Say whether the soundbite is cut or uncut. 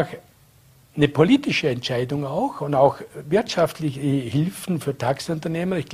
uncut